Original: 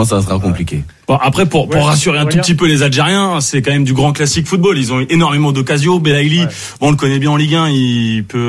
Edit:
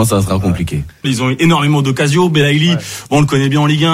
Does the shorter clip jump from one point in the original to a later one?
yes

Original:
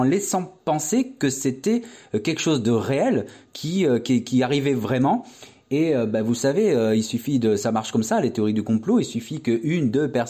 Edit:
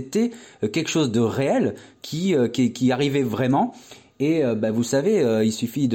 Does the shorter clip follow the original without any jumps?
yes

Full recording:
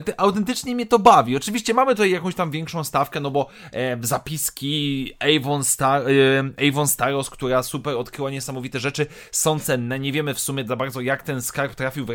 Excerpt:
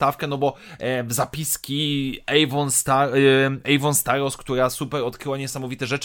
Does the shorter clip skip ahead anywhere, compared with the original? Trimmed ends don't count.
no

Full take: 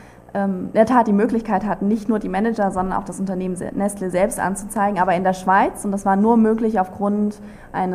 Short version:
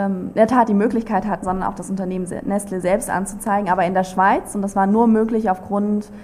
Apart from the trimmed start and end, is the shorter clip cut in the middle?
yes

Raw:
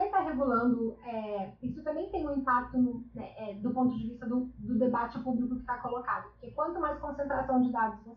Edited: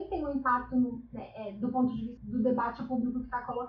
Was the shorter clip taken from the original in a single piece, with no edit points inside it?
no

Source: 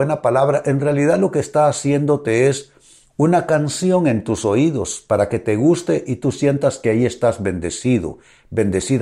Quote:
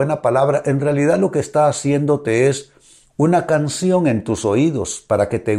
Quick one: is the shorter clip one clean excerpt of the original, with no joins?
yes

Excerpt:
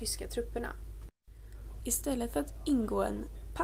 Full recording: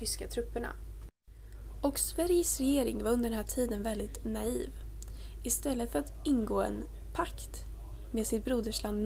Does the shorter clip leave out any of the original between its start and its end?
yes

